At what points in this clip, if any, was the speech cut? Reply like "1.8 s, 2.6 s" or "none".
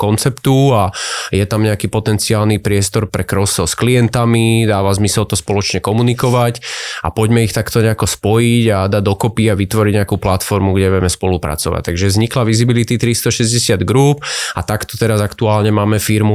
3.1 s